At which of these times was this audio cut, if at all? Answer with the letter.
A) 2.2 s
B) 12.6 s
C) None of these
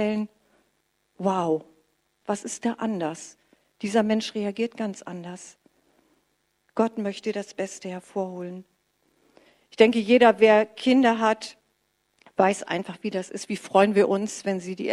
A